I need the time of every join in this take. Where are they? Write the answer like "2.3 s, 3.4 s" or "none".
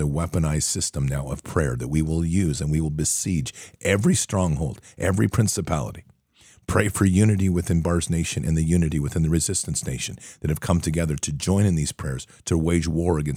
none